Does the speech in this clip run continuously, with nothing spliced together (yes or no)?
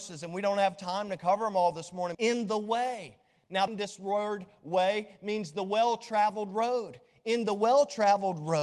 no